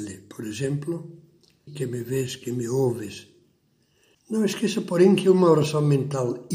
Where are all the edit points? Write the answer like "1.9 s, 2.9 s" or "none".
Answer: 1.7 s, 4.1 s